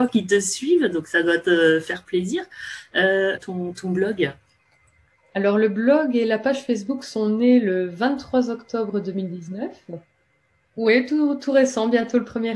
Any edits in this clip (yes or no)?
yes